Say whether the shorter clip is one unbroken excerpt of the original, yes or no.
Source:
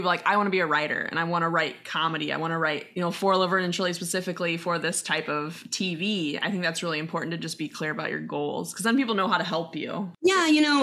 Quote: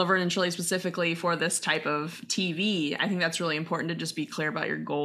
yes